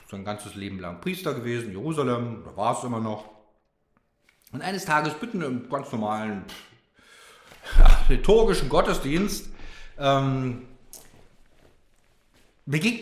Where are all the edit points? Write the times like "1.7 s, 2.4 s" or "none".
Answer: none